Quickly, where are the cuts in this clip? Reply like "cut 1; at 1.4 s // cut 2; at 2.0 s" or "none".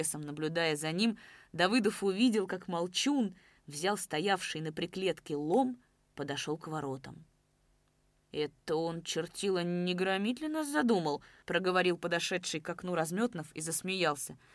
none